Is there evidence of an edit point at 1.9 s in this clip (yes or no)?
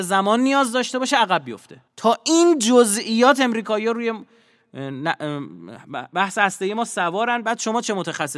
yes